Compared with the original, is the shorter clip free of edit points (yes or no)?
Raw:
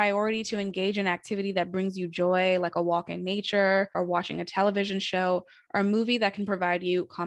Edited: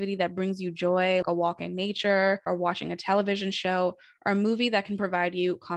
no